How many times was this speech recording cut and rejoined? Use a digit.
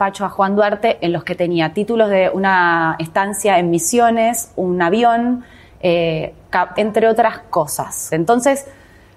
2